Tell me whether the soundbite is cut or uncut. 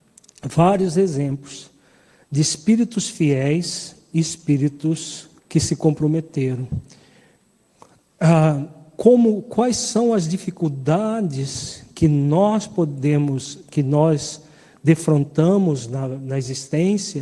cut